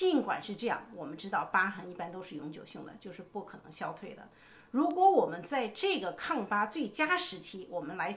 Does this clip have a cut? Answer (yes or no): no